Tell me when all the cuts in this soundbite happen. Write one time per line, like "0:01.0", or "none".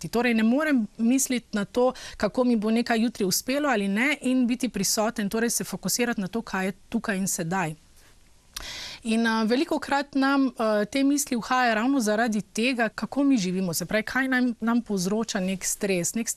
0:12.9

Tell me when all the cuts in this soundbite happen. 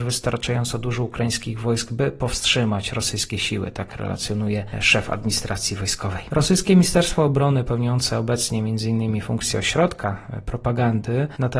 none

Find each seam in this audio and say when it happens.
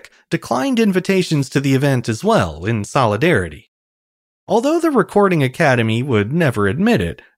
none

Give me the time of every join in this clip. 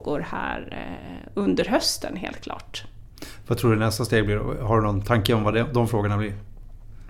none

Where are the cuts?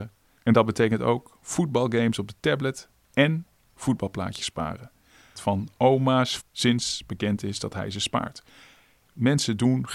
0:05.3
0:06.4

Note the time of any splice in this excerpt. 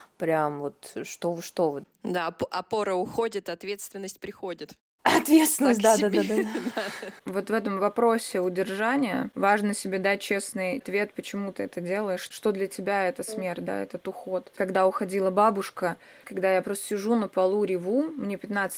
0:14.5
0:16.2

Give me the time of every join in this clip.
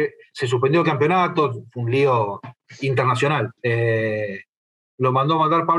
0:03.6

